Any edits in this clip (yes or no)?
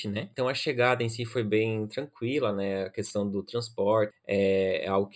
yes